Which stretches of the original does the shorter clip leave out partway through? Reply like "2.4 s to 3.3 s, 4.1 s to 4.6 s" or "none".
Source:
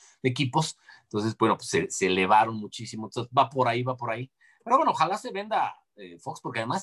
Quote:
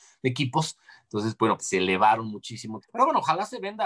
1.6 s to 1.9 s, 3.1 s to 4.5 s